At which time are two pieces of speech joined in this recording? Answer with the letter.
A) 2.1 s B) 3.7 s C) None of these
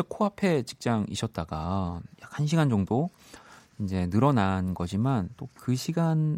A